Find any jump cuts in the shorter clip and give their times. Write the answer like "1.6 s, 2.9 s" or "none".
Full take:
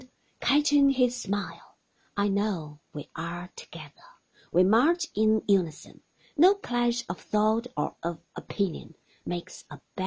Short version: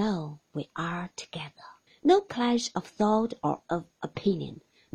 1.9 s